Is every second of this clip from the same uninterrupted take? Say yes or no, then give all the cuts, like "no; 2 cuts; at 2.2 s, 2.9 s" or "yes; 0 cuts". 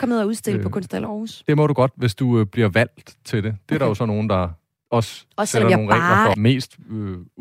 no; 1 cut; at 6.3 s